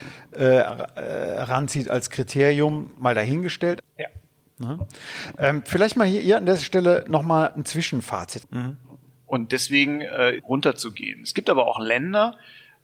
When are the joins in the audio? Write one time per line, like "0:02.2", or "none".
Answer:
0:03.8
0:08.4
0:10.4